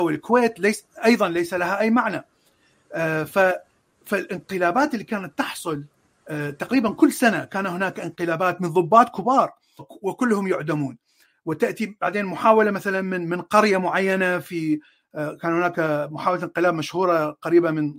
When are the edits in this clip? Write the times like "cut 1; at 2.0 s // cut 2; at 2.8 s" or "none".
cut 1; at 9.8 s